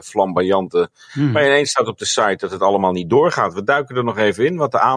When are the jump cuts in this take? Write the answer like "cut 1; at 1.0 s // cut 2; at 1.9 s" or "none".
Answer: cut 1; at 1.1 s